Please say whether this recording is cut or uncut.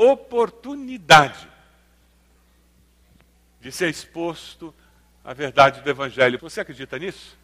cut